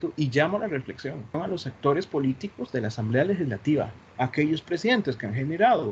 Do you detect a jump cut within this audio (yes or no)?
yes